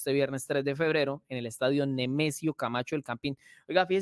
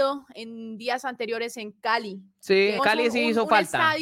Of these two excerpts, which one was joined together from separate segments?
second; 1 cut; at 2.8 s

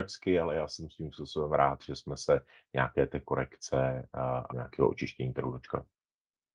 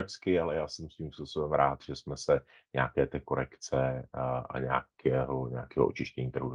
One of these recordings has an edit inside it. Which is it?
first; 1 cut; at 4.5 s

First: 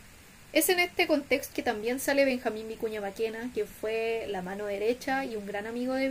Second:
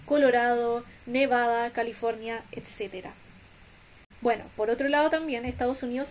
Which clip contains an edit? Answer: first; 1 cut; at 1.5 s

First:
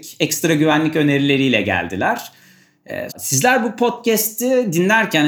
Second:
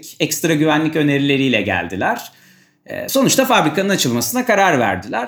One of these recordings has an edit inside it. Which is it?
first; 1 cut; at 3.1 s

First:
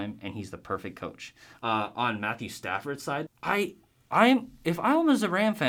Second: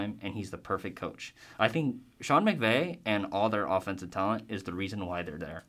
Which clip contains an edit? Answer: first; 2 cuts; at 1.6 s, 3.3 s

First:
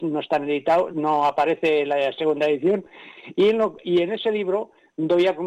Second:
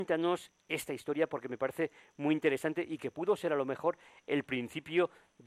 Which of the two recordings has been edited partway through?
first; 2 cuts; at 0.9 s, 3.8 s

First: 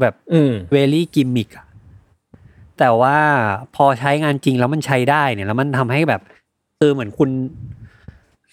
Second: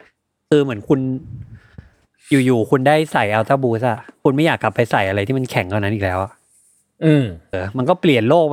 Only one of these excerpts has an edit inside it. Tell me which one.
second; 1 cut; at 7.5 s

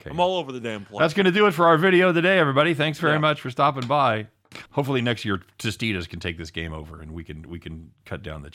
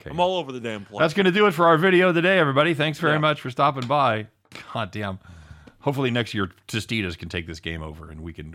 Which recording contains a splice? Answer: first; 1 cut; at 4.7 s

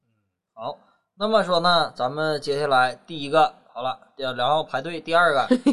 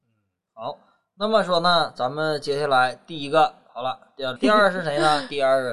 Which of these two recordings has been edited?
second; 1 cut; at 4.4 s

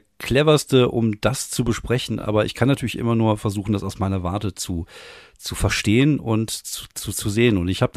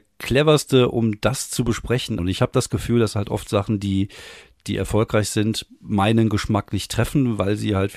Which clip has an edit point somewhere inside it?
second; 1 cut; at 2.2 s

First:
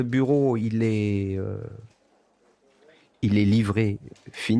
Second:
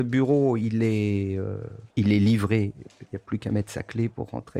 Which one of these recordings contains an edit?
second; 2 cuts; at 1.9 s, 3.1 s

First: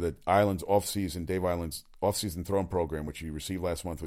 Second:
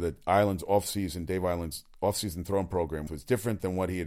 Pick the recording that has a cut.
second; 1 cut; at 3.1 s

